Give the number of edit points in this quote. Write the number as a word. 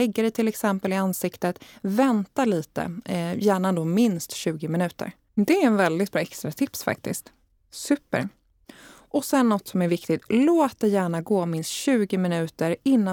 one